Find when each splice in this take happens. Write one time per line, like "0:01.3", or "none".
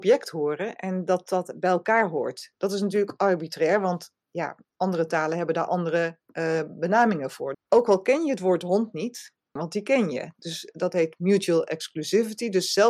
0:07.5
0:09.6